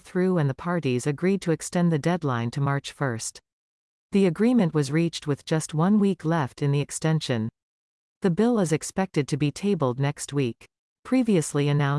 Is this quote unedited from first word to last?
yes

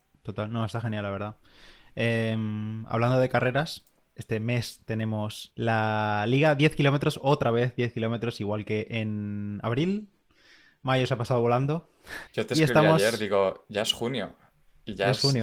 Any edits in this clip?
yes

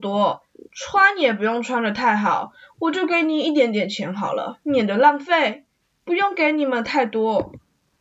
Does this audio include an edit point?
no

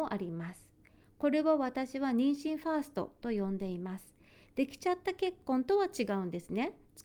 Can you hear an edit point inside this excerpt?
no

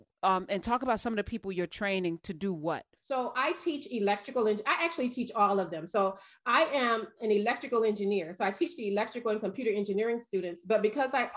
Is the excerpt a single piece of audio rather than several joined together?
no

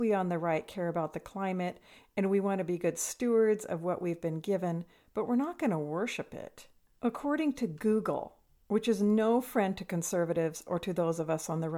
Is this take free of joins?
yes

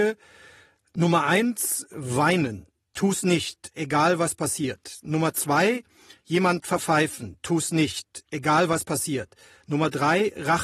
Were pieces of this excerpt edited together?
no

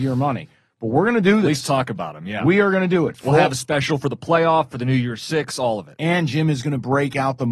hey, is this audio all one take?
yes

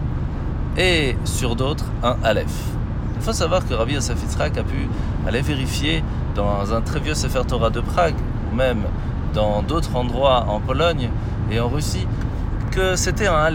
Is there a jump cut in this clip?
yes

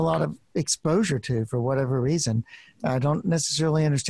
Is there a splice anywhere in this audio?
no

